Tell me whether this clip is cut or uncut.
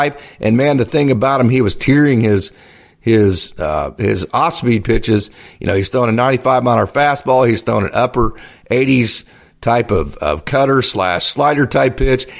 uncut